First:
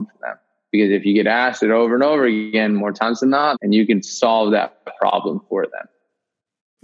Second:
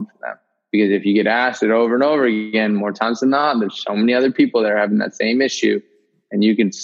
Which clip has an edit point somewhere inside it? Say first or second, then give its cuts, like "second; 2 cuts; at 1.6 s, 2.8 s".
first; 1 cut; at 3.5 s